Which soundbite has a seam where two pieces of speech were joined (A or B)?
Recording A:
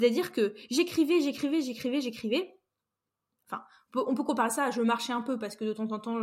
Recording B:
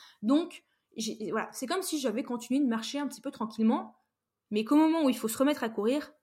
A